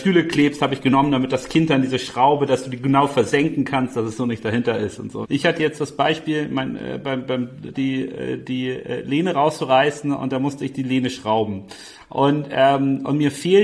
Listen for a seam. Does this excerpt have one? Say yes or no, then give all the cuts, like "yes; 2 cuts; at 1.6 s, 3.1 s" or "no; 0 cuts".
yes; 2 cuts; at 5.2 s, 7.7 s